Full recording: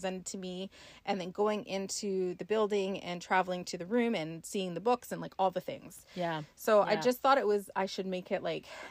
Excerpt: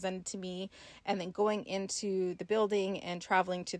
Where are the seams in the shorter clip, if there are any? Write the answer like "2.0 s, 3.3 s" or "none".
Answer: none

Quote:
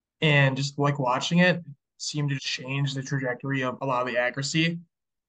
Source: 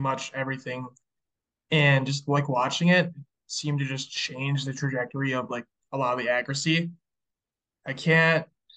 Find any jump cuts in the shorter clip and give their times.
2.4 s, 3.8 s

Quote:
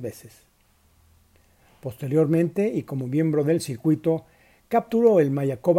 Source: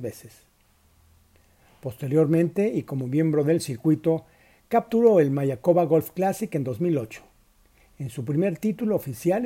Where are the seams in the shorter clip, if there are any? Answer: none

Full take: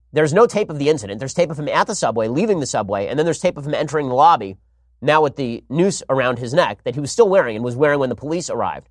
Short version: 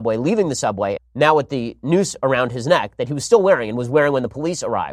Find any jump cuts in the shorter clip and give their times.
1.0 s

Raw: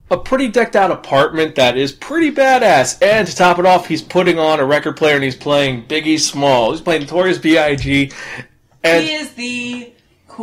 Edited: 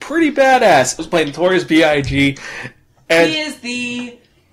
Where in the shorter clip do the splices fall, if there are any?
1.0 s

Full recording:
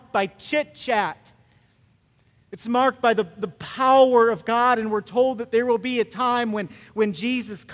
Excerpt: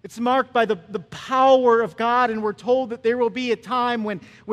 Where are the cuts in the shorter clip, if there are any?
none

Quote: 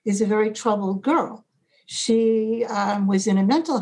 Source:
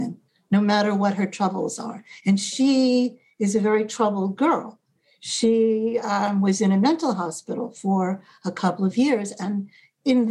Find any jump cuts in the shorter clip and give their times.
none

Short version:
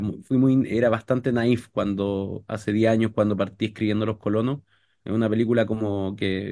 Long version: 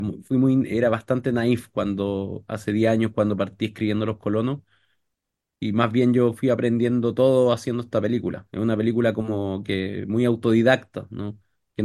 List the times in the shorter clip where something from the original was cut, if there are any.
5.0 s

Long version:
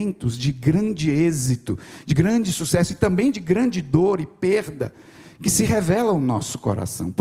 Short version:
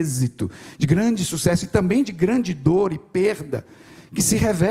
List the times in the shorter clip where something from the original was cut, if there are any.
none

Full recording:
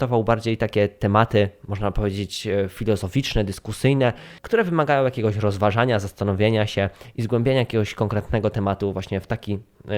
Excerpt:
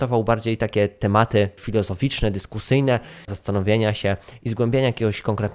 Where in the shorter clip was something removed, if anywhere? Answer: 1.6 s, 3.3 s

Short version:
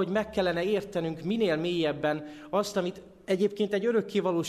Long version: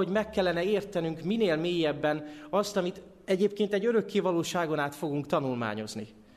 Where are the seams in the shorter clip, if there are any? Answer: none

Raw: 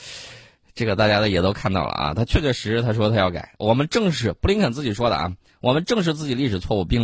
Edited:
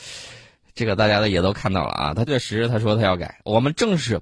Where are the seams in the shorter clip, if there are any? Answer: 2.3 s

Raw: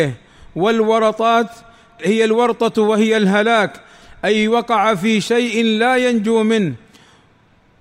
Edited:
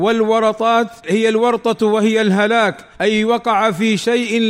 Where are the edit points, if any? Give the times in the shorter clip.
1.0 s, 2.9 s

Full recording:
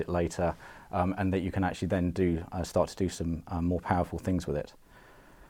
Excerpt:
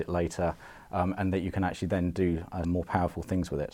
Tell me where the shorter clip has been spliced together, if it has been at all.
2.6 s

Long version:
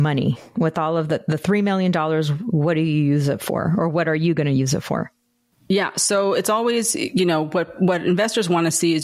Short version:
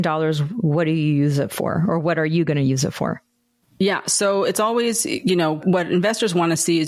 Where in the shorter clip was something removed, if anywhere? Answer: 5.6 s

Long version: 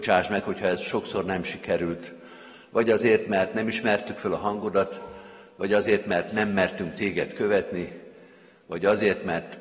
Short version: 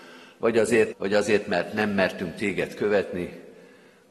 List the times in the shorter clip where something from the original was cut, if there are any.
0.9 s

